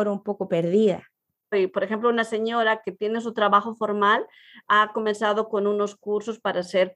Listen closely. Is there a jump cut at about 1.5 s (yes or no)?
yes